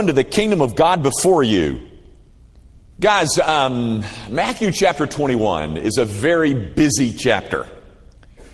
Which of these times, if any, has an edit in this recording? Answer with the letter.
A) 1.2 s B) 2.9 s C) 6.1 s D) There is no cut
B